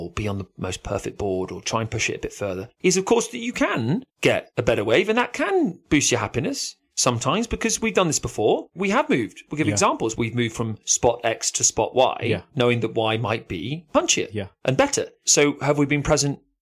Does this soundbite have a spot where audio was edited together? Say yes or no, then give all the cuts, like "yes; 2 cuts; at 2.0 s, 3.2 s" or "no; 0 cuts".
no; 0 cuts